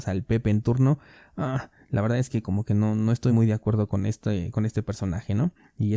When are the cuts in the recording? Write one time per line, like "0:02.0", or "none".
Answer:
none